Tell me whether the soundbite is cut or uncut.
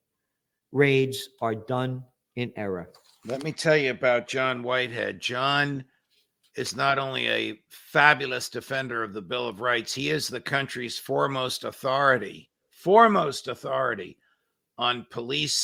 uncut